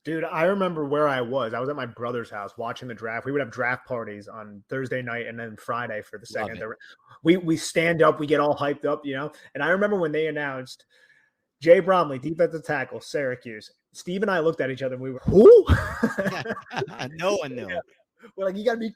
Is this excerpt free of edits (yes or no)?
no